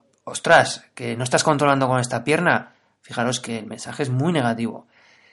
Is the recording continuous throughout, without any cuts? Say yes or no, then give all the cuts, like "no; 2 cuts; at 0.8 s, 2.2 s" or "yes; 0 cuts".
yes; 0 cuts